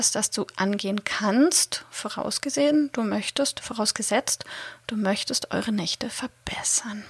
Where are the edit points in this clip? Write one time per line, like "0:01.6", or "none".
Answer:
none